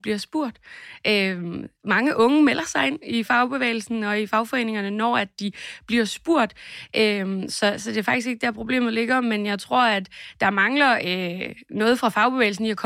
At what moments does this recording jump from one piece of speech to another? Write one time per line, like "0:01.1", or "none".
none